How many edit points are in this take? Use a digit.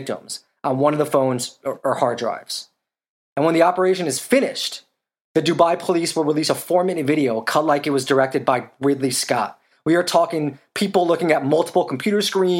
1